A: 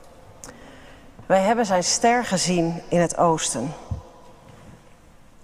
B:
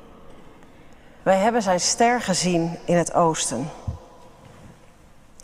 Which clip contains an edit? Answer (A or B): B